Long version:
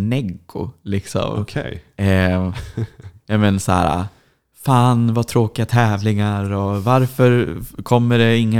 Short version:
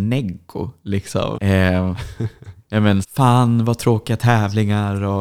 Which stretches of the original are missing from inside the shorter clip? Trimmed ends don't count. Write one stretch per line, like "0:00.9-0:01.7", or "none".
0:01.3-0:01.9
0:03.6-0:04.5